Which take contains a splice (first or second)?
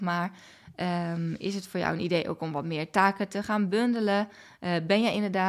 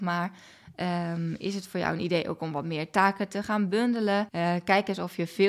second